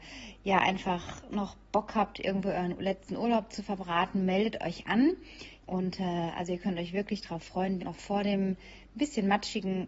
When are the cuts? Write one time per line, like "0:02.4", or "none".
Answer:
0:05.6
0:07.8